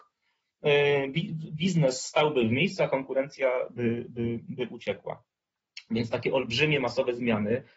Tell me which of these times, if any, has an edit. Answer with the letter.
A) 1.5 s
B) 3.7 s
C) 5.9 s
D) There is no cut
D